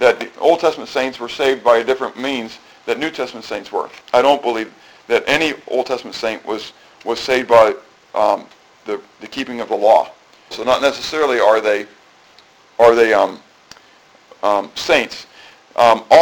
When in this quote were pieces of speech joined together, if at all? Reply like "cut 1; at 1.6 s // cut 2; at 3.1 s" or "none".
cut 1; at 4.0 s // cut 2; at 10.5 s